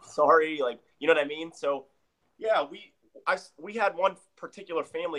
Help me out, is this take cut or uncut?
cut